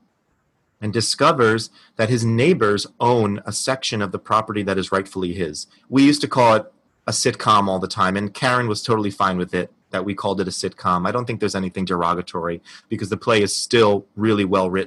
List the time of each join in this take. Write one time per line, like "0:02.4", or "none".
0:05.8